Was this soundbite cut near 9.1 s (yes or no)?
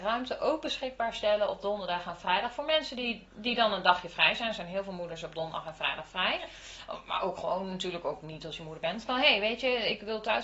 yes